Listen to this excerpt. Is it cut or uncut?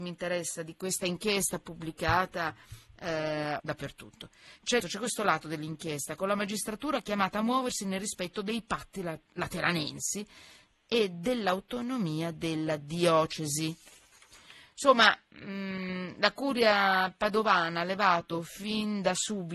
cut